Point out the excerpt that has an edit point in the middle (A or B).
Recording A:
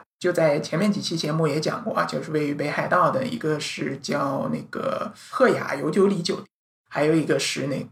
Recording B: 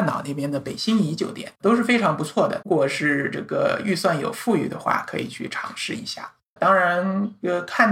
B